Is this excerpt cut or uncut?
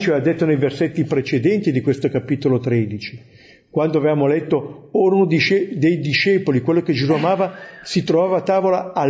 uncut